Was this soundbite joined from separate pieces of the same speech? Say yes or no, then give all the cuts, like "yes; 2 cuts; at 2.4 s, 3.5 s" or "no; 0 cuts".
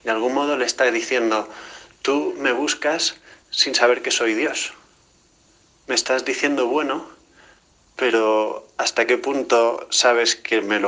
no; 0 cuts